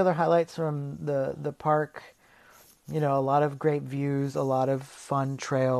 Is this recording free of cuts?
yes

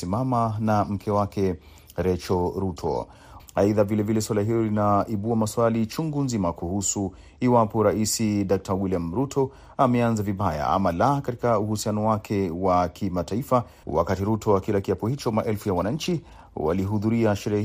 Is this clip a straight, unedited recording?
no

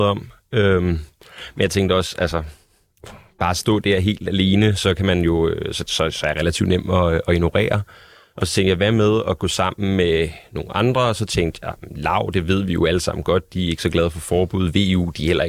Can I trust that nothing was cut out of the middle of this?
yes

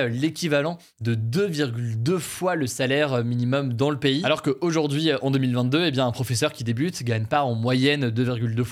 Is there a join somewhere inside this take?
no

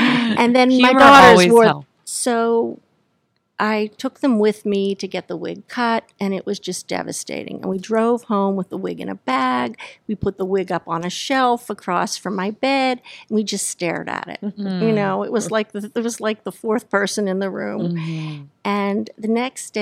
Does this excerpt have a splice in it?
yes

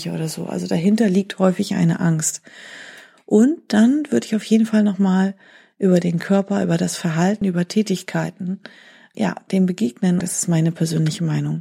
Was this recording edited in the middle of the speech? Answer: yes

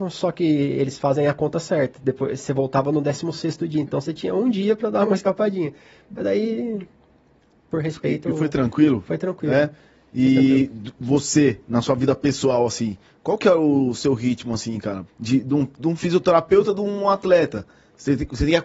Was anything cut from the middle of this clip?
yes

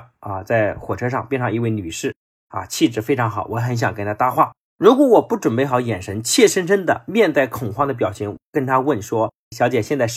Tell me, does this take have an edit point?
no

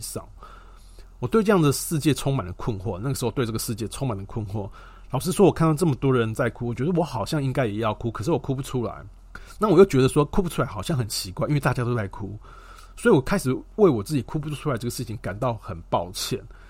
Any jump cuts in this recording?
no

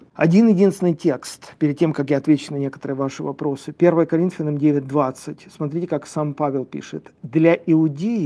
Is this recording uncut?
yes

